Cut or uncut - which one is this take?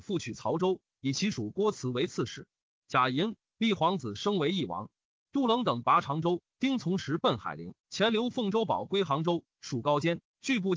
cut